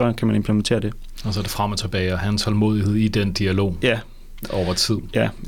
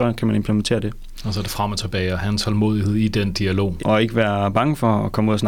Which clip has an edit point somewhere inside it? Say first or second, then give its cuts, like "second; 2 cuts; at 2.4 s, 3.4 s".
second; 1 cut; at 3.8 s